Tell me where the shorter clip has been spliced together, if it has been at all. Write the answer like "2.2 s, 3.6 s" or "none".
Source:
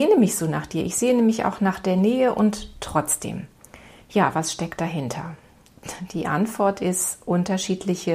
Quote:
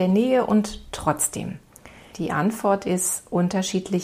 2.1 s